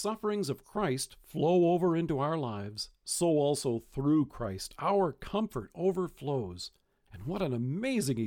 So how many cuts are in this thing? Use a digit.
1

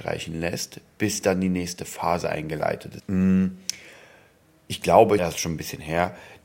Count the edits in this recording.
2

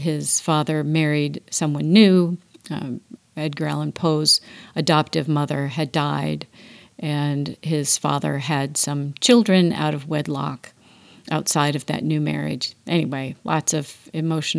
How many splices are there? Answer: 1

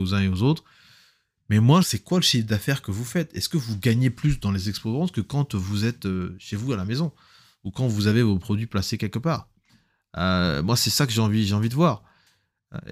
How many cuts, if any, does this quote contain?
1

